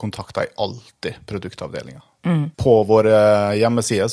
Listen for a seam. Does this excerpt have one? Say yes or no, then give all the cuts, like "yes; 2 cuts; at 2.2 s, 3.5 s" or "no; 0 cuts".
yes; 1 cut; at 2.5 s